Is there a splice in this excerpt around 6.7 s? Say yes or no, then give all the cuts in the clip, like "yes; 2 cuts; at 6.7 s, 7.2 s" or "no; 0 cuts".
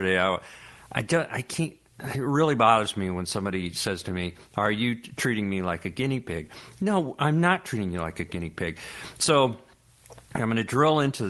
no; 0 cuts